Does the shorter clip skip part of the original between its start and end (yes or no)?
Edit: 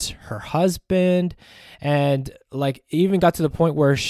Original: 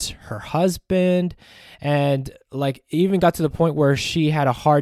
no